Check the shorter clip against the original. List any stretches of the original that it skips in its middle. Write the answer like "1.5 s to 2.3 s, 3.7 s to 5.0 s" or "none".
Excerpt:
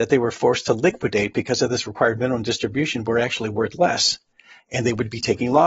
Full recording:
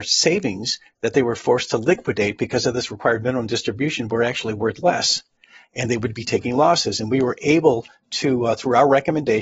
none